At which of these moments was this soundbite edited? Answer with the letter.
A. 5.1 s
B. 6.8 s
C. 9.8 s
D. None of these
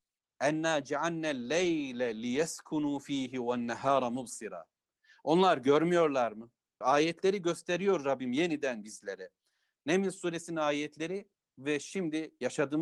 B